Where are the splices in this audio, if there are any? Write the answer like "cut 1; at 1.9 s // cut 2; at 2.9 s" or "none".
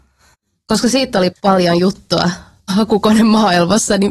cut 1; at 1.3 s